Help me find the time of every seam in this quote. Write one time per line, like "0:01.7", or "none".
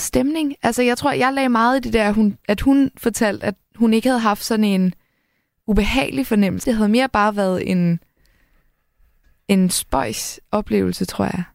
0:06.6